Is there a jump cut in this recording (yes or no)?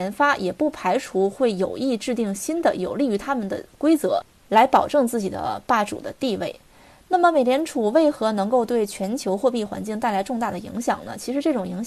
no